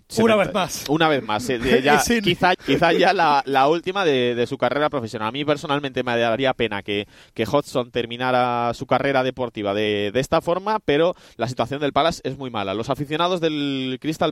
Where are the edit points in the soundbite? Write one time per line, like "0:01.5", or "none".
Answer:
0:02.5